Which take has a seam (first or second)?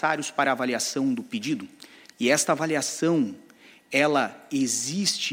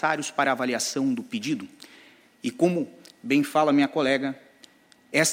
first